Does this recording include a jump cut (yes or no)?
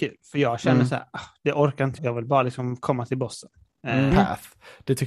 yes